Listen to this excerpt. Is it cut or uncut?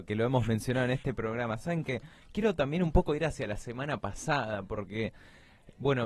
uncut